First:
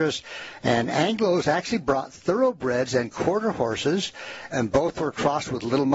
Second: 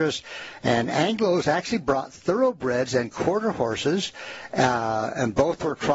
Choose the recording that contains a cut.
first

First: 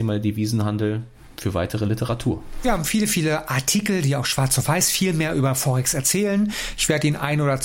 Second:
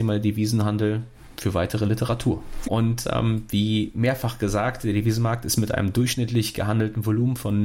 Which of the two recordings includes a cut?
second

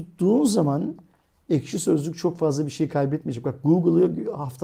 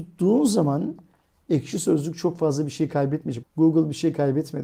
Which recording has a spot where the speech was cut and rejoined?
second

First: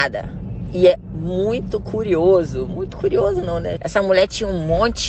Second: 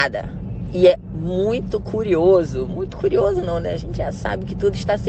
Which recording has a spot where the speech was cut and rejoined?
first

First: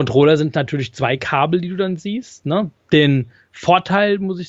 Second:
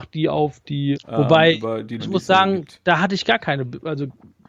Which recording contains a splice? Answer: second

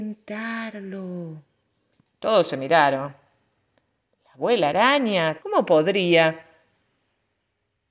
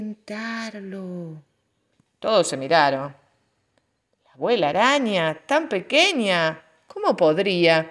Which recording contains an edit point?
first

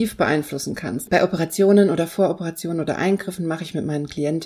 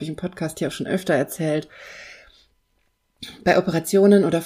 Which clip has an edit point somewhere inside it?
first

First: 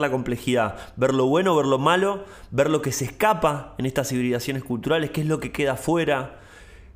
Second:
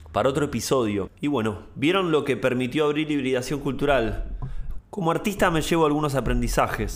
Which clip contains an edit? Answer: second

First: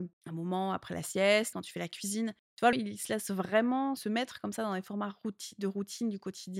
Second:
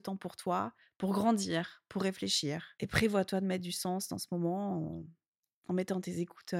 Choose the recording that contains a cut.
first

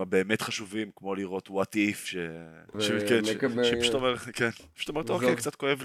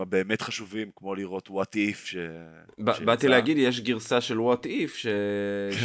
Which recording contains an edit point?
first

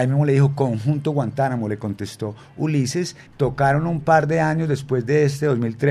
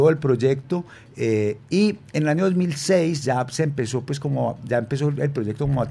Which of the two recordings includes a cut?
first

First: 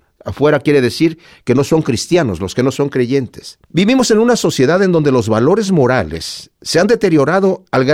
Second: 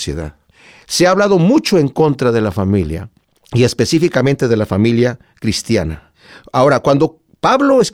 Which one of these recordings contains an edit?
first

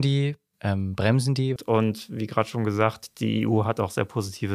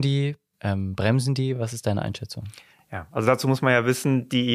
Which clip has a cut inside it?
first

